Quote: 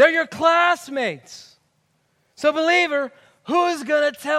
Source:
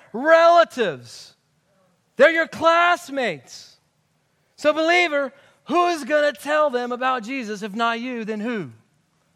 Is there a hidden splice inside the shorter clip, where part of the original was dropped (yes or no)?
no